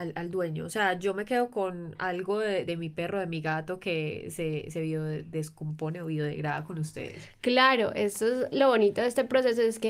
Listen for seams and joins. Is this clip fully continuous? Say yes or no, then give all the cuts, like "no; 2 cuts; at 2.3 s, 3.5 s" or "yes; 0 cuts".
no; 1 cut; at 2.6 s